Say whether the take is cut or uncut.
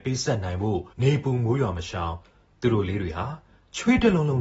cut